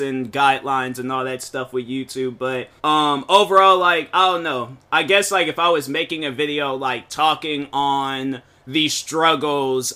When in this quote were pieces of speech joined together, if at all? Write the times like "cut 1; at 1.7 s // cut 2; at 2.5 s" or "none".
cut 1; at 2.8 s